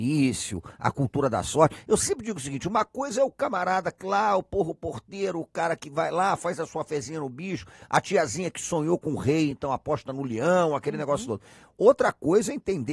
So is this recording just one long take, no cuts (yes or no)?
yes